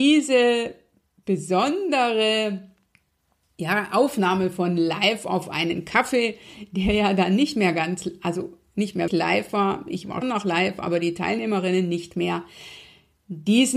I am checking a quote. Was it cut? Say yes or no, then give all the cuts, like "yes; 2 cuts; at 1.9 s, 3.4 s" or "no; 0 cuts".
yes; 2 cuts; at 9.1 s, 10.2 s